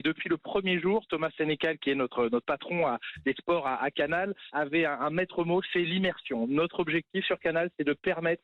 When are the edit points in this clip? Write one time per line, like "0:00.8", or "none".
0:04.5